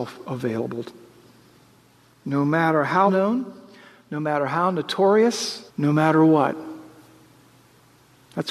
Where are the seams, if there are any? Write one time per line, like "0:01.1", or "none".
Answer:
0:03.1
0:05.7